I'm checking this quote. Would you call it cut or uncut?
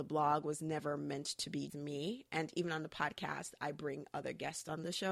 cut